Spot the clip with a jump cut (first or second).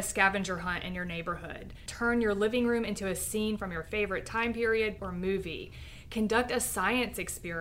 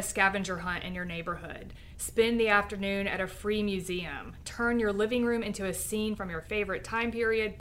first